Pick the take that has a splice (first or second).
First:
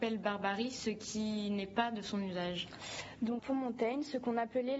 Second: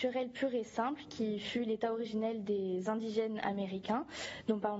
first